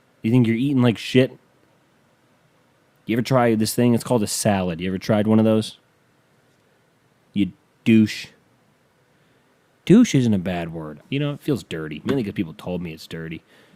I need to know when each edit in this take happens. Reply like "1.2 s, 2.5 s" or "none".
11.0 s